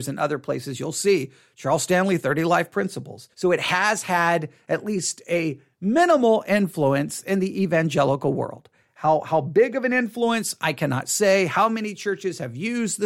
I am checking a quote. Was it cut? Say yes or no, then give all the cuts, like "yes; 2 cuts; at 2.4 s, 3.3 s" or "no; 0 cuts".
yes; 1 cut; at 3.3 s